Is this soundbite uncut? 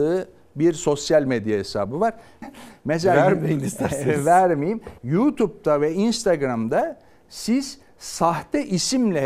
no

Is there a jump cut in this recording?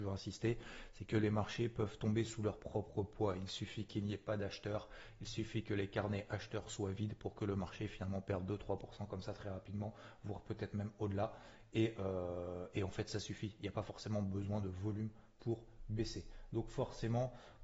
no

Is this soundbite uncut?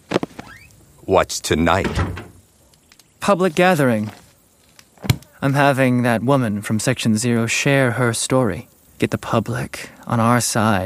yes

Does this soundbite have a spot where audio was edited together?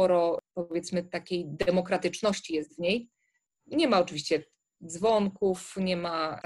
no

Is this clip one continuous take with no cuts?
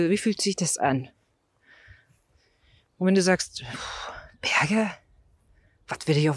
yes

